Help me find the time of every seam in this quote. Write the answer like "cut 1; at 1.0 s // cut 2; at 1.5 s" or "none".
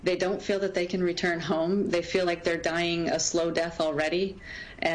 none

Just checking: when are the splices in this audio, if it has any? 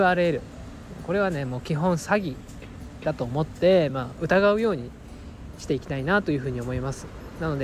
none

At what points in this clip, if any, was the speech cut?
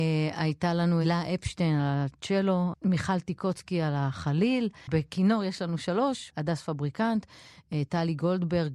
cut 1; at 1.0 s

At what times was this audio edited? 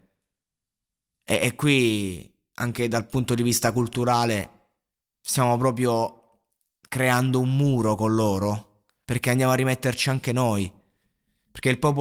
cut 1; at 9.0 s

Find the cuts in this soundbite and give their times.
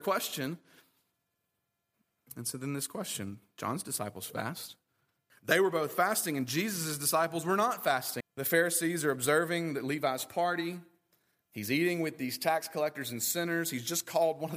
cut 1; at 5.3 s // cut 2; at 8.2 s

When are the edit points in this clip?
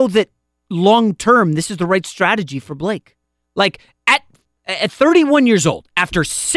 none

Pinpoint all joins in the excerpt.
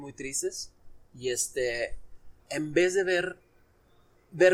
cut 1; at 2.4 s

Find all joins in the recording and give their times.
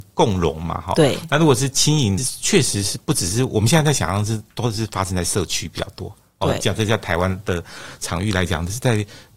cut 1; at 2.2 s

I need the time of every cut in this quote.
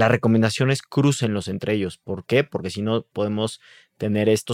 none

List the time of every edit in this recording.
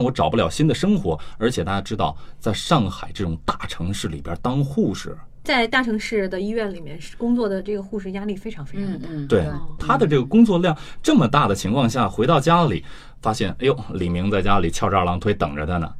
none

